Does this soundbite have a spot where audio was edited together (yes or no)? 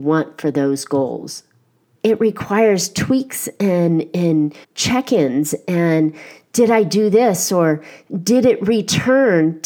yes